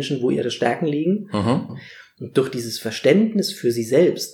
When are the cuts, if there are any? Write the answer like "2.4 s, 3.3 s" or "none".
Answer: 1.7 s